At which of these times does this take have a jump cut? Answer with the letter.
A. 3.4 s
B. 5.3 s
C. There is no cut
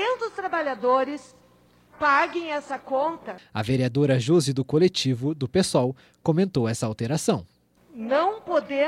A